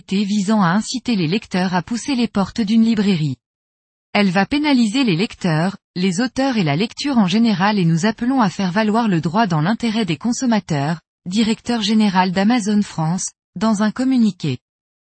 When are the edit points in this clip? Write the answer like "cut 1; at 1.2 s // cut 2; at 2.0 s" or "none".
cut 1; at 4.0 s // cut 2; at 11.1 s